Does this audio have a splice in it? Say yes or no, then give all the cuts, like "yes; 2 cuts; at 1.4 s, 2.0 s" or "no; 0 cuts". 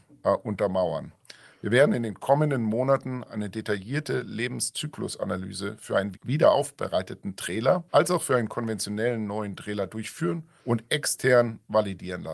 yes; 3 cuts; at 6.1 s, 7.9 s, 10.6 s